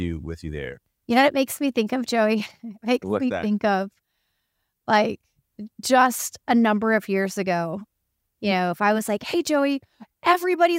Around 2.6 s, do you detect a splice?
no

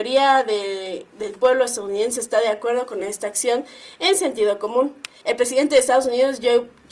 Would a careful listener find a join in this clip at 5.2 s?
yes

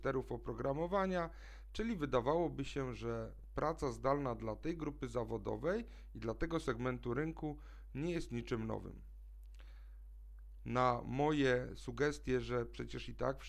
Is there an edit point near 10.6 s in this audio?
yes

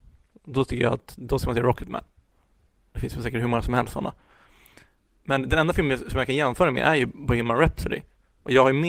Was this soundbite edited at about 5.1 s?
no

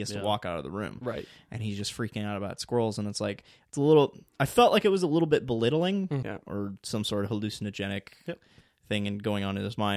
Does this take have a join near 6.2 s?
yes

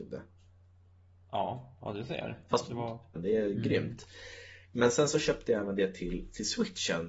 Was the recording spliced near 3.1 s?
yes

